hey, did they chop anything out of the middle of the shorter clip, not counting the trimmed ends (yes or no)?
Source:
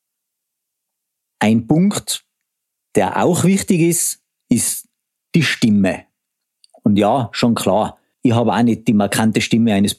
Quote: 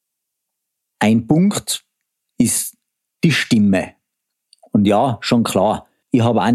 yes